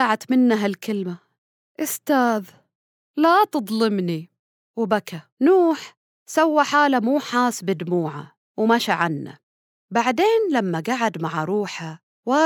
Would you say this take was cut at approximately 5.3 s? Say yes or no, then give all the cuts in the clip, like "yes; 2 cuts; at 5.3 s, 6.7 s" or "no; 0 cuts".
yes; 1 cut; at 5.3 s